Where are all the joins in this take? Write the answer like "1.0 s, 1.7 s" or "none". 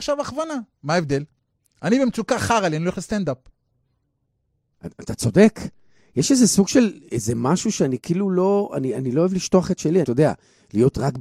10.0 s